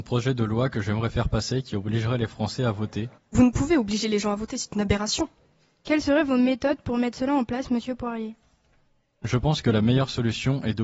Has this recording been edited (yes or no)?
yes